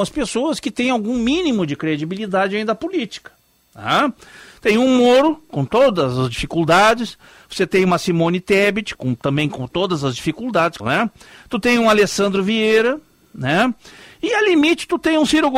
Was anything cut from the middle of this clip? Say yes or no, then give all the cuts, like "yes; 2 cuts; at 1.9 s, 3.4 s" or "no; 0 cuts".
yes; 2 cuts; at 8.9 s, 10.8 s